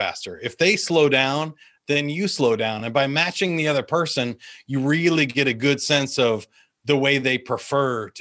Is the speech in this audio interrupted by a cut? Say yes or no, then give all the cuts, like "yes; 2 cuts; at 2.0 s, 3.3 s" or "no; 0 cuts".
no; 0 cuts